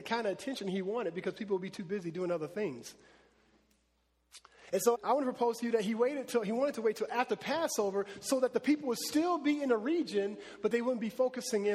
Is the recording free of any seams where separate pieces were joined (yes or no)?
no